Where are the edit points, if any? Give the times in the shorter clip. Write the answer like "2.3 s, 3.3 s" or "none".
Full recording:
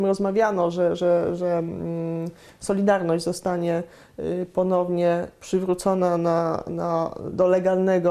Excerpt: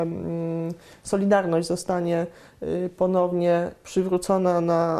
none